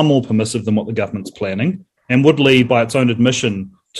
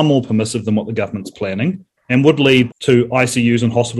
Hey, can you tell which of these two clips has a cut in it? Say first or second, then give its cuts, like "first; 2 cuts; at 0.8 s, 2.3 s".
second; 1 cut; at 2.7 s